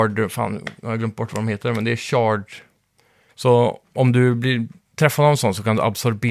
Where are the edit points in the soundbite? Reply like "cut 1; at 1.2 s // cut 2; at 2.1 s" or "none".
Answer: cut 1; at 3.3 s

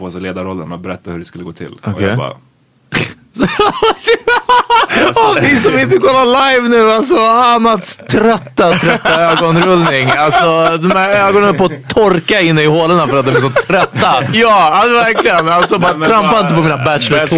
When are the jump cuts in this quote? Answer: cut 1; at 5.3 s // cut 2; at 14.3 s

